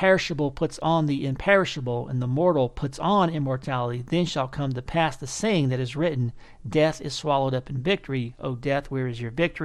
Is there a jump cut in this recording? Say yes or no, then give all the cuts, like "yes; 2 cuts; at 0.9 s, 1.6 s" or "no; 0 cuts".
no; 0 cuts